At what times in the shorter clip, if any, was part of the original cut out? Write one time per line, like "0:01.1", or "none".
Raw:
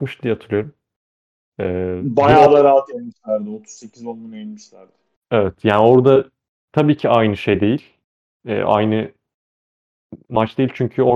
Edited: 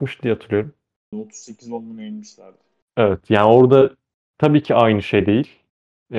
0:01.1